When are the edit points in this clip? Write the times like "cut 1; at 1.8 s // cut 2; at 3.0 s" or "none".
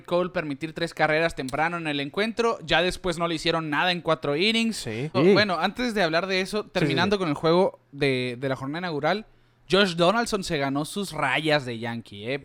cut 1; at 5.1 s